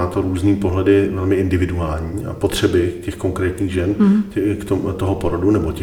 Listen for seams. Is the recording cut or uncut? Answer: uncut